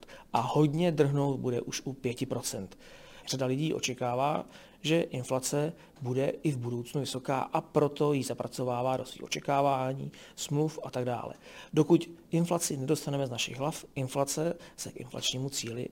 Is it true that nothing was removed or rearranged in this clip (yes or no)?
no